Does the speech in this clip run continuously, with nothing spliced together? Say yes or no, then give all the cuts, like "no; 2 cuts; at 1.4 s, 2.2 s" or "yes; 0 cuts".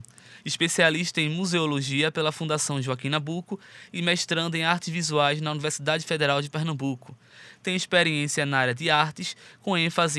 yes; 0 cuts